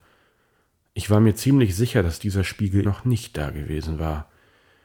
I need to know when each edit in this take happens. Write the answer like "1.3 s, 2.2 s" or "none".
2.8 s